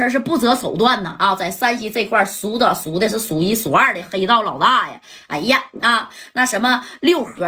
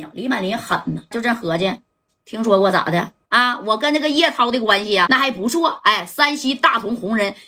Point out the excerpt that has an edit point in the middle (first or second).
second